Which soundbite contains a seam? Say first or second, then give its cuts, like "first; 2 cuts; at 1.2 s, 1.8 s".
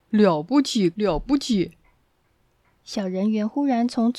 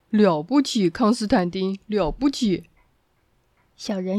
first; 1 cut; at 0.9 s